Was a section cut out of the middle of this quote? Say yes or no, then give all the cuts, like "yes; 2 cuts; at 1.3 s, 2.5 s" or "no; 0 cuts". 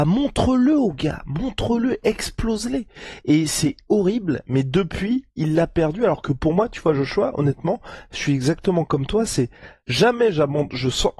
no; 0 cuts